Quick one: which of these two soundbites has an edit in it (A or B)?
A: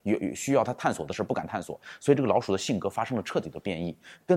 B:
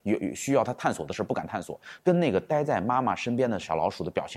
B